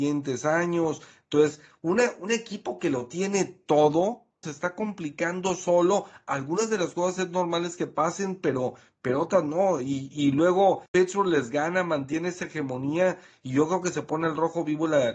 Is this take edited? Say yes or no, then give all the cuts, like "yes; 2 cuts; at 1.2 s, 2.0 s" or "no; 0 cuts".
yes; 1 cut; at 4.4 s